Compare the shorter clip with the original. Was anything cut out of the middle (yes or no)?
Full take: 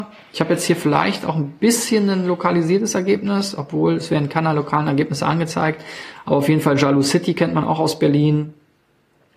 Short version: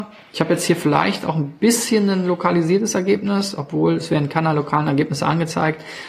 no